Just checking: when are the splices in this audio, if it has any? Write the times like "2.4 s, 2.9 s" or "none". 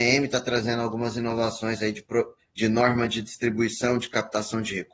2.4 s